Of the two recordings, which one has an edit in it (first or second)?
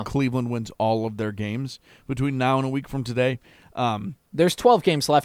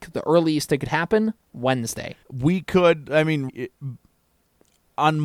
second